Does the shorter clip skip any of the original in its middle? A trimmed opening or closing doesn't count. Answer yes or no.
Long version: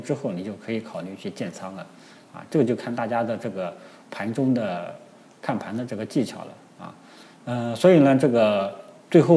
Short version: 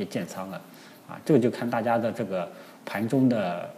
no